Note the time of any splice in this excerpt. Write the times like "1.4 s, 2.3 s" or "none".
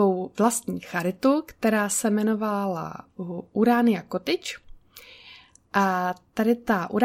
none